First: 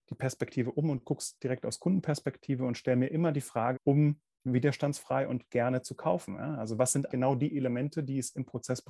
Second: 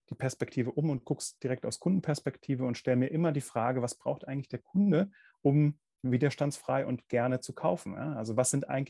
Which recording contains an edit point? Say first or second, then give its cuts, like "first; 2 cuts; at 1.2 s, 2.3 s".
first; 2 cuts; at 3.7 s, 7.1 s